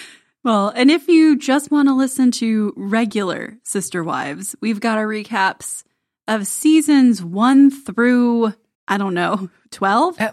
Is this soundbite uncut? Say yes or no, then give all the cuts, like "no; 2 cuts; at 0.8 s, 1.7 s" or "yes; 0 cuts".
yes; 0 cuts